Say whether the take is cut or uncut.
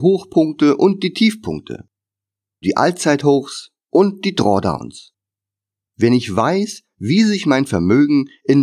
cut